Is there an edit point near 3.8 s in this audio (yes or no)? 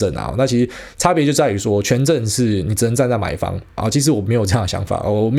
yes